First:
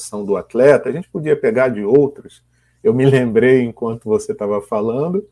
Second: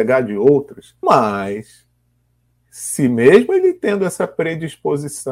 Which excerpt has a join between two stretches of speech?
second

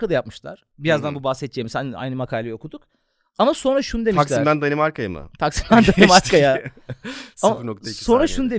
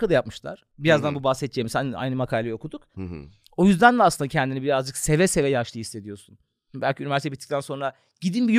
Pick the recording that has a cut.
second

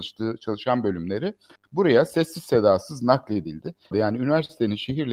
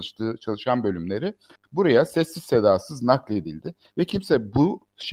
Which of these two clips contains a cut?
first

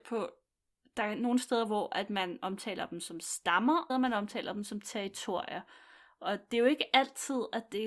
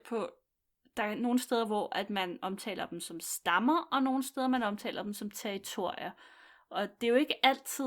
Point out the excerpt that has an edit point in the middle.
first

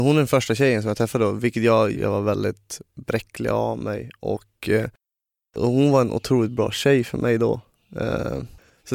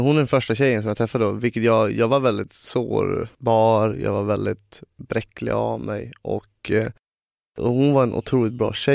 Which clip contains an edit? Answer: first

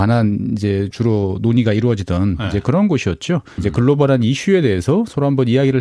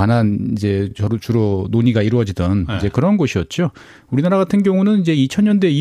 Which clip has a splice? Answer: first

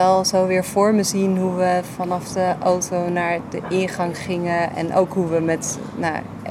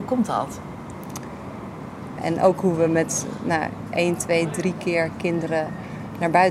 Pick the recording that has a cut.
second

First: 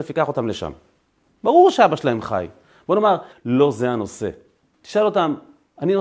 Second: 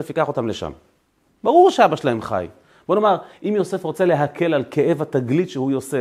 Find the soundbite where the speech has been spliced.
first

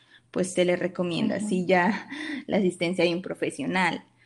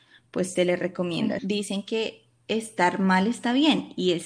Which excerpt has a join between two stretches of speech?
second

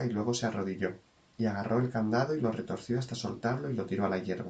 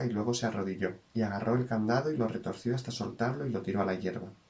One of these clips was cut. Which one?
second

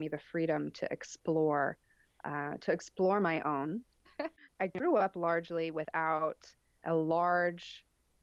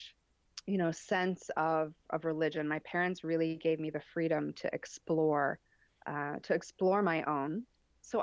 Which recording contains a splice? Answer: first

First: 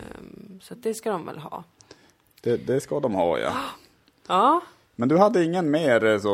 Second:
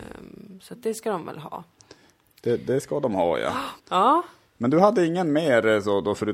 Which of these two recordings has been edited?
second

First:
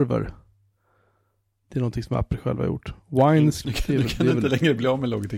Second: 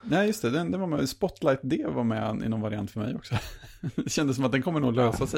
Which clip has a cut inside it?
first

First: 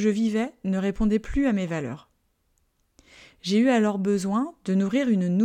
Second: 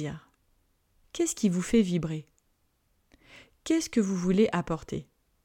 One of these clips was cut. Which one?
second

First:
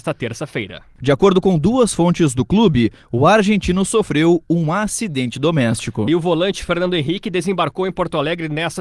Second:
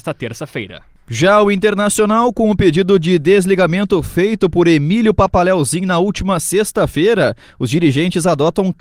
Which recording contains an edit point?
first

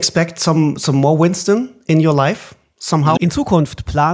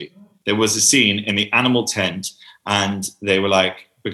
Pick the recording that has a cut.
first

